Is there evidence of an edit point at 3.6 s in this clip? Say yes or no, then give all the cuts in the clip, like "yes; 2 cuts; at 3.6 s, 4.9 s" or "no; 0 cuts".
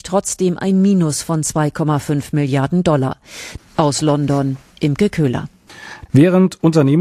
yes; 2 cuts; at 3.6 s, 6.1 s